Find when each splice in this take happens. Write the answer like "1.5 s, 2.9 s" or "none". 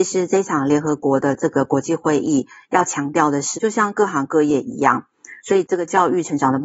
3.5 s, 5.4 s